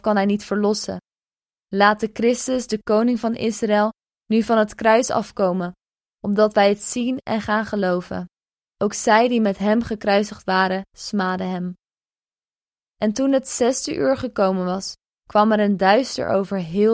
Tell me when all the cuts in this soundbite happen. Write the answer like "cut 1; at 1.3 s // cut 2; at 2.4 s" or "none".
none